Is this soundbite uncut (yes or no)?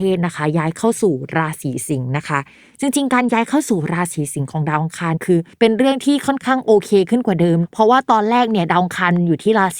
no